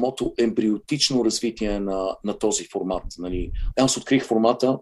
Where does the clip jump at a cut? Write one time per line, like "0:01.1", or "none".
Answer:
0:03.7